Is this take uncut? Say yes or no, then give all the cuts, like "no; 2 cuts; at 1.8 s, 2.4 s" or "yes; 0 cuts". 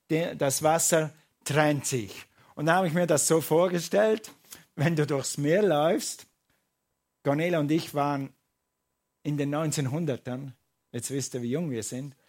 yes; 0 cuts